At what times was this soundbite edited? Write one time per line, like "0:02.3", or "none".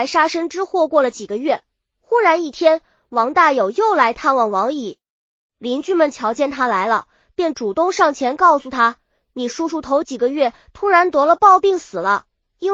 none

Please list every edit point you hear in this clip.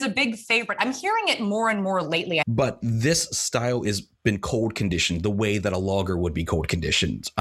0:02.4

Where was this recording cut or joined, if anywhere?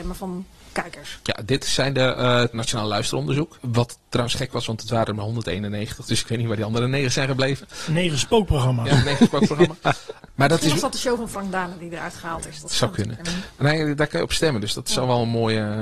0:02.5

